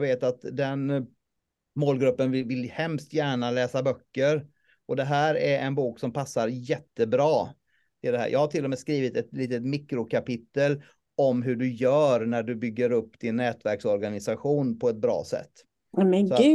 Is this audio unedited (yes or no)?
yes